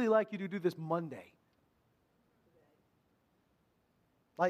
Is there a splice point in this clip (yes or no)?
no